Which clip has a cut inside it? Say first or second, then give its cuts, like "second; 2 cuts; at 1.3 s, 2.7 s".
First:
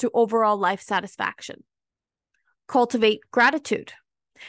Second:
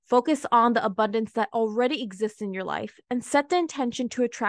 first; 1 cut; at 2.5 s